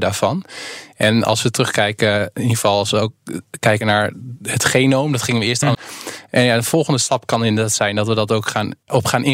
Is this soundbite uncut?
no; 1 cut; at 5.7 s

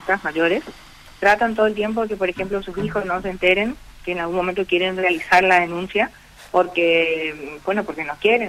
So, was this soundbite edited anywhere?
no; 0 cuts

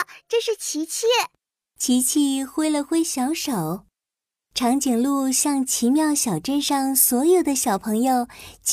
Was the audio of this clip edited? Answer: yes; 1 cut; at 4.4 s

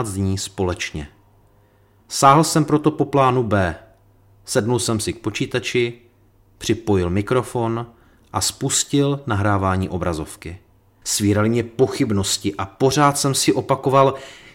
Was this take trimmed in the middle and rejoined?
yes; 2 cuts; at 2.0 s, 11.0 s

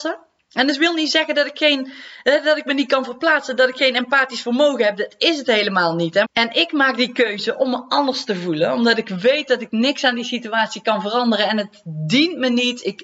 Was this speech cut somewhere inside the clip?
yes; 1 cut; at 6.2 s

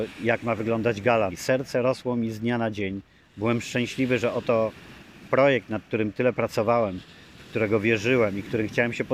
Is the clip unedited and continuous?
no; 1 cut; at 1.3 s

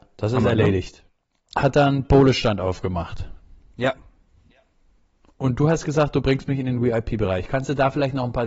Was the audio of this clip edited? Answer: yes; 1 cut; at 1.5 s

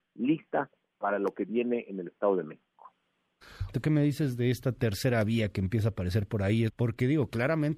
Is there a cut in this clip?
yes; 2 cuts; at 3.7 s, 6.7 s

